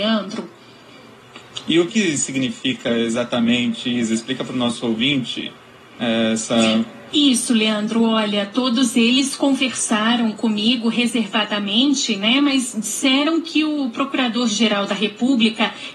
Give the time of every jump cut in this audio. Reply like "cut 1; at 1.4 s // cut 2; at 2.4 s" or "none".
cut 1; at 1.9 s // cut 2; at 7.1 s